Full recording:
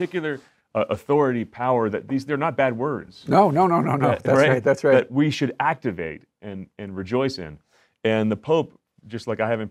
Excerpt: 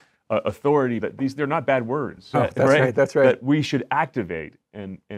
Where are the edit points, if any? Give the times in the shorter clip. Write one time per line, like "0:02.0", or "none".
0:01.0
0:02.3